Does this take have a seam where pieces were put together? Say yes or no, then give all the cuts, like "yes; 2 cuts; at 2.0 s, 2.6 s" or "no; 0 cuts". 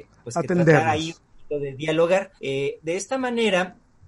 yes; 1 cut; at 2.4 s